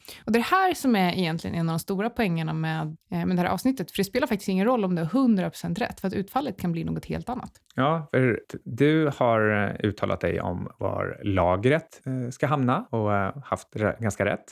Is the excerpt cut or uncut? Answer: cut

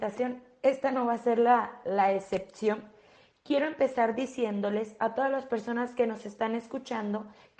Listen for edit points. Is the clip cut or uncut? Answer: uncut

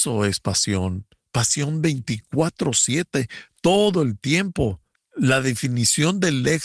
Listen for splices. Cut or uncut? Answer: cut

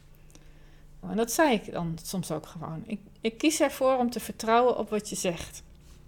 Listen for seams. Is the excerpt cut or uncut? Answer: cut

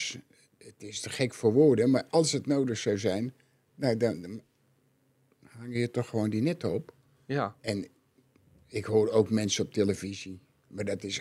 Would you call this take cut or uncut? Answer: uncut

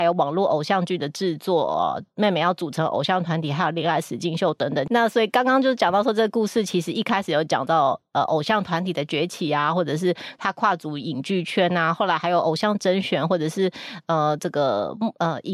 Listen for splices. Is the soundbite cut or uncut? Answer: cut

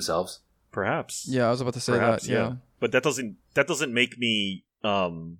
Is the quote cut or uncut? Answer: uncut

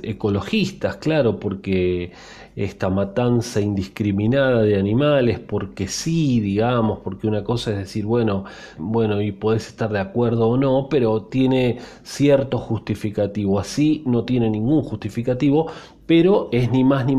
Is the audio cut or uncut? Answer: cut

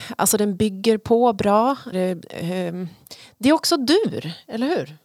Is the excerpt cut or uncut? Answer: cut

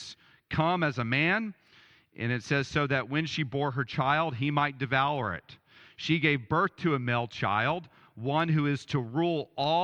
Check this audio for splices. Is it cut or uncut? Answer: uncut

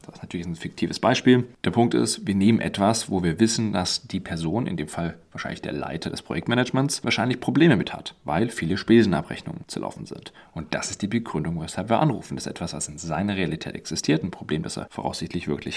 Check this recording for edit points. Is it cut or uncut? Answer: uncut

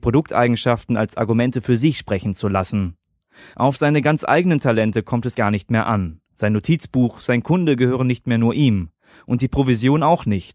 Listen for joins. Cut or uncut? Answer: cut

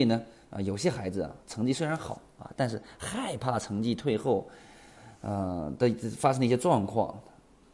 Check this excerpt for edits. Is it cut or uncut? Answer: uncut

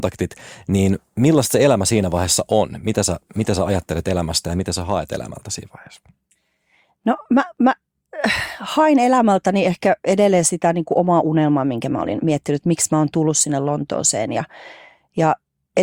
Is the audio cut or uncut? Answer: uncut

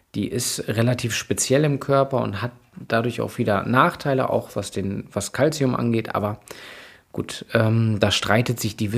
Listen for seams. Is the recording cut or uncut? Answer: uncut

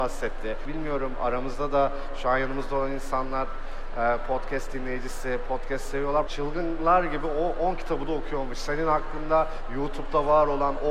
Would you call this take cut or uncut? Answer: cut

